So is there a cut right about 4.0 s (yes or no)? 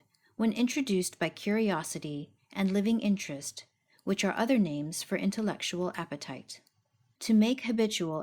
no